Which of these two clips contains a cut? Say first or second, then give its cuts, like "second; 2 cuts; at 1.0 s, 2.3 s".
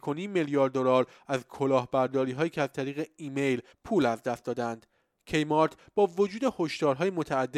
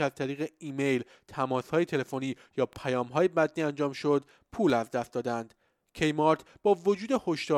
first; 1 cut; at 3.7 s